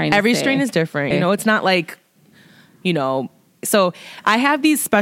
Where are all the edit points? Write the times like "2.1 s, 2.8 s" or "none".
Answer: 1.1 s, 3.6 s